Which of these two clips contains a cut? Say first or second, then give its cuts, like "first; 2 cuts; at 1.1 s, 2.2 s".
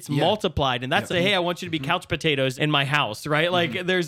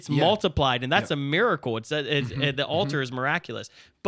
first; 2 cuts; at 1.1 s, 2.5 s